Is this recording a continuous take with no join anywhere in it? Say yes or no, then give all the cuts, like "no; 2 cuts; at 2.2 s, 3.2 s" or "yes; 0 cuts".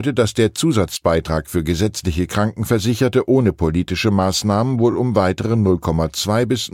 yes; 0 cuts